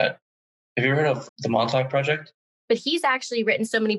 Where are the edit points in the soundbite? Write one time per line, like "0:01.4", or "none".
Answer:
0:01.3
0:02.6

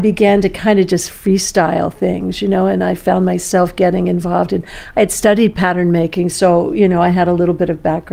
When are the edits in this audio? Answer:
none

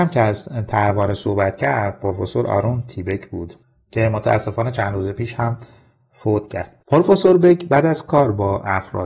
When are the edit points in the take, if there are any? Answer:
0:06.8

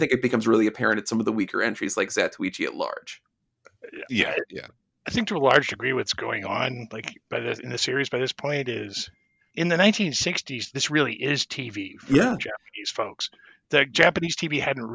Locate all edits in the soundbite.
0:09.5

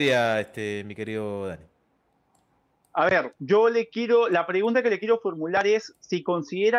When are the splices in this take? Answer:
none

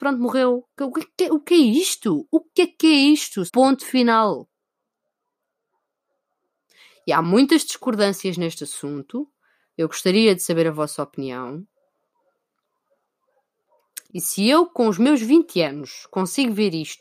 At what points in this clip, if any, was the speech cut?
0:03.5
0:14.1

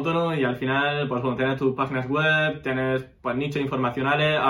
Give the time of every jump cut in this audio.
none

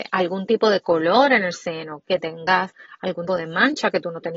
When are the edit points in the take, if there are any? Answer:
0:03.3

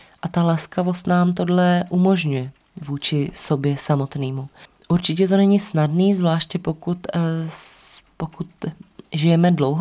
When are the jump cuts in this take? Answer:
none

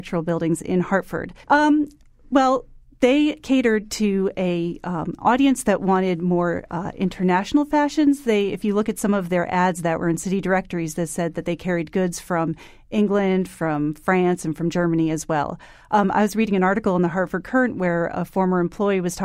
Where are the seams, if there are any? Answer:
0:01.4

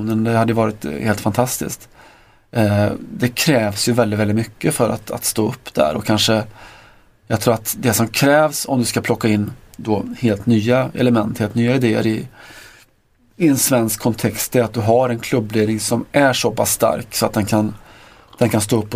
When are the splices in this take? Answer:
none

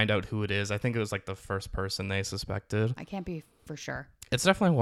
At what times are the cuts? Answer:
0:03.0

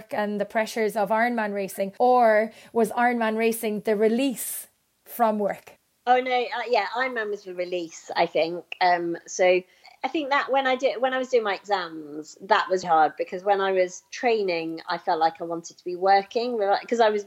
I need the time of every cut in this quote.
0:12.8

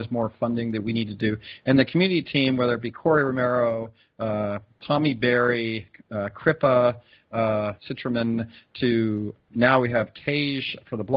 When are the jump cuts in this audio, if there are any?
0:07.8
0:09.5

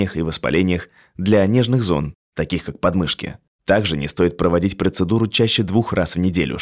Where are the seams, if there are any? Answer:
none

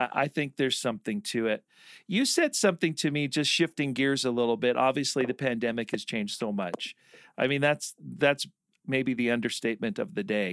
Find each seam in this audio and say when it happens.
none

